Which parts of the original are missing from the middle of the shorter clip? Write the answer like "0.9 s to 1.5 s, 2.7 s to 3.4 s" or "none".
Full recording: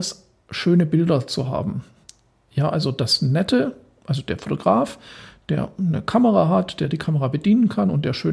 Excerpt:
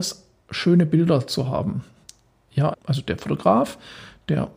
2.7 s to 3.9 s

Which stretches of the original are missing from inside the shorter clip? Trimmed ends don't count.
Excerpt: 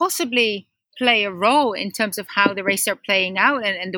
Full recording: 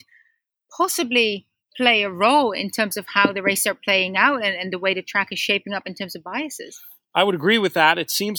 none

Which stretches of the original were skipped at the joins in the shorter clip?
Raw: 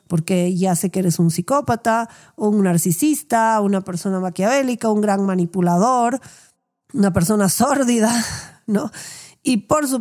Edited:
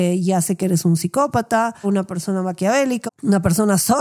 2.2 s to 3.6 s, 4.8 s to 6.8 s

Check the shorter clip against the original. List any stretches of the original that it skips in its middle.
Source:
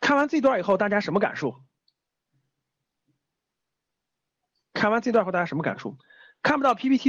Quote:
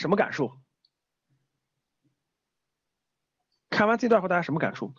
none

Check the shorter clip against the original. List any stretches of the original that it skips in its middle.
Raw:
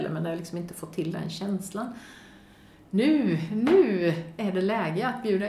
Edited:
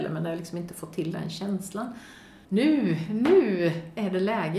2.4 s to 2.9 s

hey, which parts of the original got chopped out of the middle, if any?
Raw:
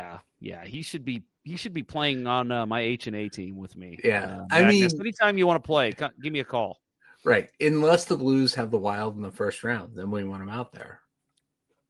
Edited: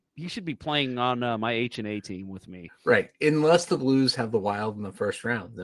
4.0 s to 7.1 s

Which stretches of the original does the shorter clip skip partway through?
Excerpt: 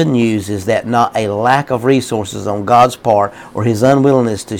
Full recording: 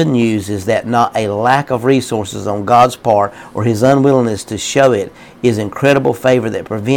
none

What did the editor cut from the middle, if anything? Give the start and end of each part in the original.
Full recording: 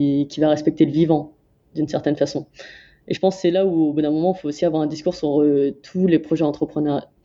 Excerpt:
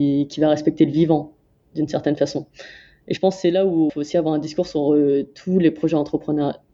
3.9 s to 4.4 s

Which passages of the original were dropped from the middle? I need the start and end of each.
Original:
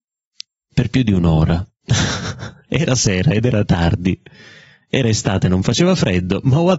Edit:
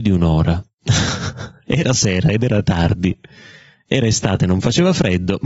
none

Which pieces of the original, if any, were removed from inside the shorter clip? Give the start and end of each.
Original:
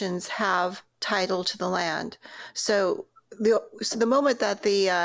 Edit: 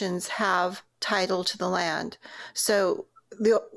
none

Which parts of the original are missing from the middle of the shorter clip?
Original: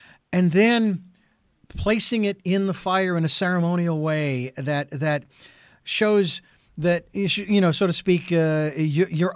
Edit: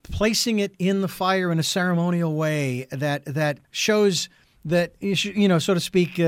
5.3 s to 5.8 s

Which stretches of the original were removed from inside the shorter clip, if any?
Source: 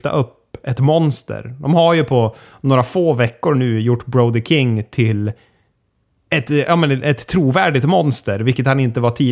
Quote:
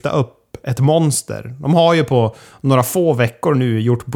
none

